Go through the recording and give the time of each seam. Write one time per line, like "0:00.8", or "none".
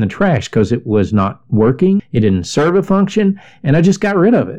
0:02.0